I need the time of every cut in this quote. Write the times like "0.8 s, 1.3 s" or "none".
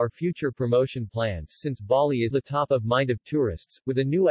2.3 s